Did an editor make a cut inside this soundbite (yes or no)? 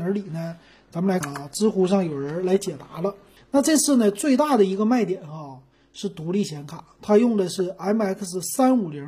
yes